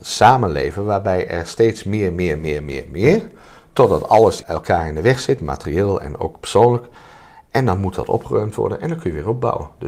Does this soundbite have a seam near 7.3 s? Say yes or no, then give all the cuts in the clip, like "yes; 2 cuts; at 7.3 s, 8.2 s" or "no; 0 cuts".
no; 1 cut; at 4.4 s